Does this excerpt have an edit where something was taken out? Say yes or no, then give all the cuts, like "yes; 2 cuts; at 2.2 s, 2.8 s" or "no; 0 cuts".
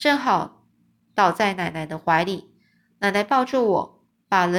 no; 0 cuts